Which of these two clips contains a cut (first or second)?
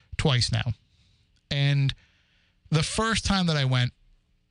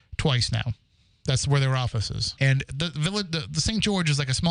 second